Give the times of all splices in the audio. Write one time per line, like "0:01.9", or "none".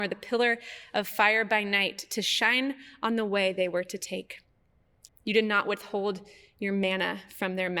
0:05.1